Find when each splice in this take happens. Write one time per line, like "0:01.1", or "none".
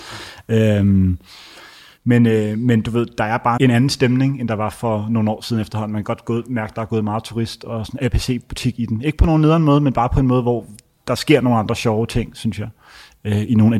0:03.6